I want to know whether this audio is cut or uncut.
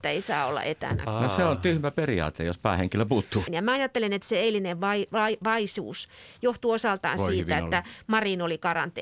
cut